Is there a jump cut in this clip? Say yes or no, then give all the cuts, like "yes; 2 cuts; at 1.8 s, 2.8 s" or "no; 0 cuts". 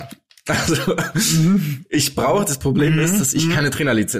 no; 0 cuts